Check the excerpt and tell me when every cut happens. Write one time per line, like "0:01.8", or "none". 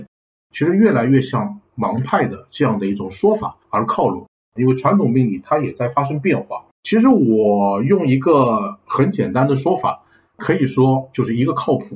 0:06.7

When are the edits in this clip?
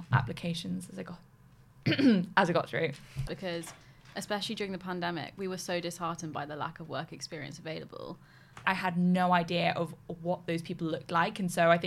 0:03.3
0:08.6

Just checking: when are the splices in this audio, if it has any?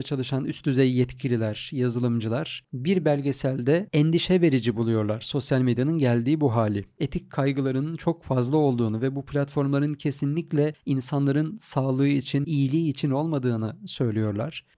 0:12.4

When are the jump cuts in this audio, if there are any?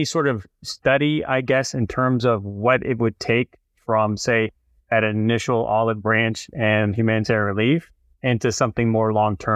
none

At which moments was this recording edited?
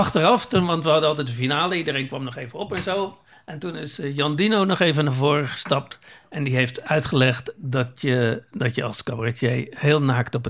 none

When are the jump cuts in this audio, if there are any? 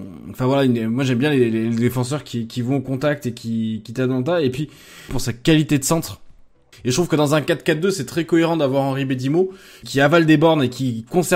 0:05.1
0:06.7
0:09.8

